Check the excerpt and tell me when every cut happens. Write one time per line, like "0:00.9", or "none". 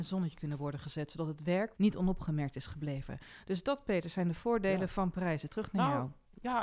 0:01.8